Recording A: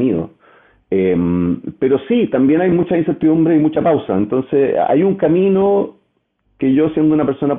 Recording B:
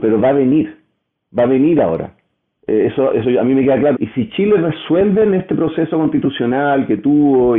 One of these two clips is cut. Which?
B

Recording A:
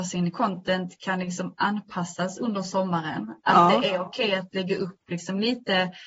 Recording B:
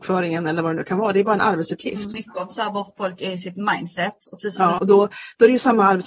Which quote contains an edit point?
B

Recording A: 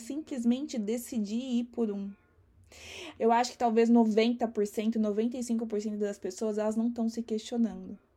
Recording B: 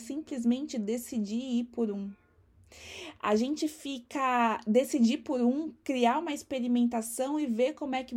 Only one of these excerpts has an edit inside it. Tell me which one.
A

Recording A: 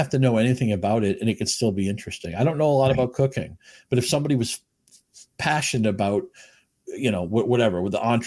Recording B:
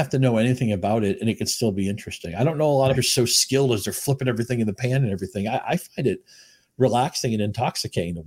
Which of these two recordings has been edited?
B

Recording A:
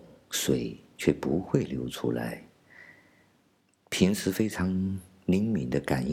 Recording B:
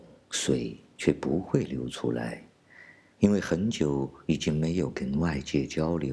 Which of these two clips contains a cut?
B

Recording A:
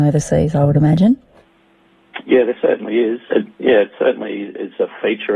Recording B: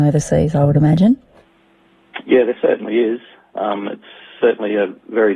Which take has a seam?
A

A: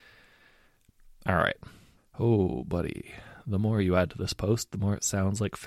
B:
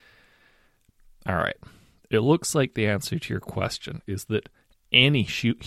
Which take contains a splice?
A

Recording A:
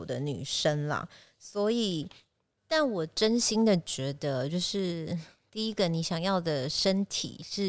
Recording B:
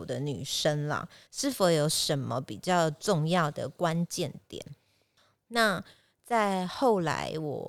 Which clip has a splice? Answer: B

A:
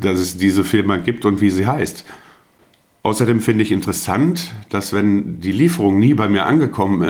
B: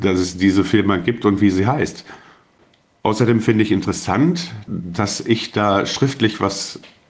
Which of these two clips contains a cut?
B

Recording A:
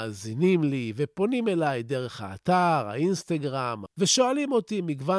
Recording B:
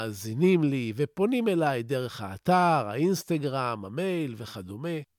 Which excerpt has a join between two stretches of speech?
A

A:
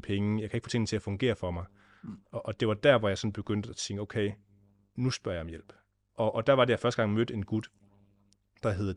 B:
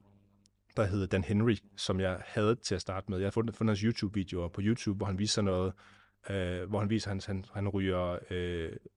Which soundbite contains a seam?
A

